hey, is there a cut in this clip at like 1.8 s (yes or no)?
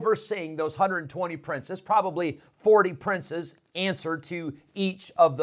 no